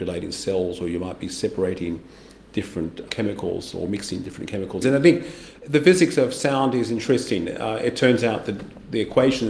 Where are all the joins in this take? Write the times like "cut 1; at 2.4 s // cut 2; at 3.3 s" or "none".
cut 1; at 4.8 s